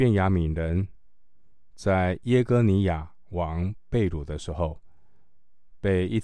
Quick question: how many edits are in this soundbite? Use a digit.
1